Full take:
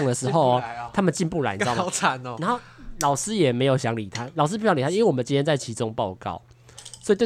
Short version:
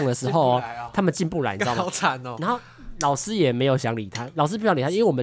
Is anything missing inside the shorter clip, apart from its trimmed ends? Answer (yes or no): no